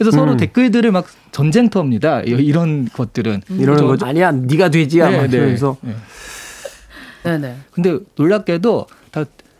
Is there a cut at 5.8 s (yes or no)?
no